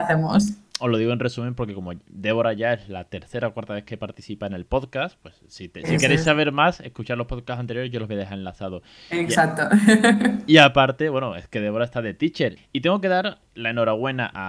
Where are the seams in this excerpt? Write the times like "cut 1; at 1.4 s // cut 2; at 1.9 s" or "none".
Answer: cut 1; at 12.6 s